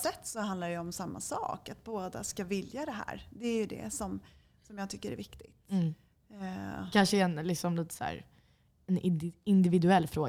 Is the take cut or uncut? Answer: uncut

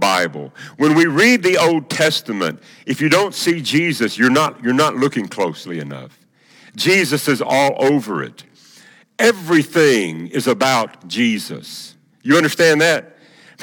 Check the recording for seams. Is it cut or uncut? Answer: uncut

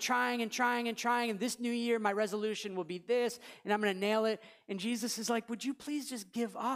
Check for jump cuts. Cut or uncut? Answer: uncut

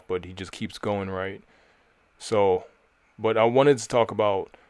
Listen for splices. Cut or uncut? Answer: uncut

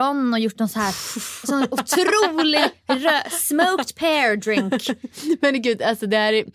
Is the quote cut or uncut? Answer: uncut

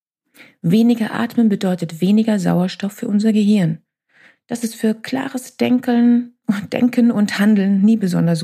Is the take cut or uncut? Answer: uncut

